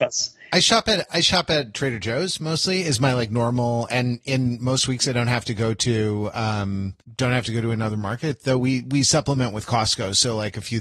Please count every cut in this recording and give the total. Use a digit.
1